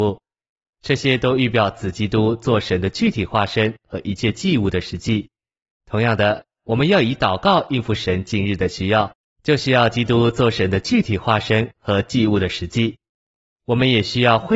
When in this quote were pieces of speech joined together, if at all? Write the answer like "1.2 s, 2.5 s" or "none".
none